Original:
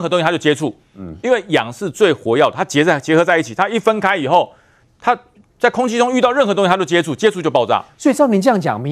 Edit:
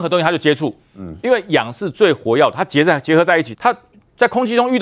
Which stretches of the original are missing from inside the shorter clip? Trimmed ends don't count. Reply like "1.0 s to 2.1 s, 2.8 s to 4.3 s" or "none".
3.5 s to 5.0 s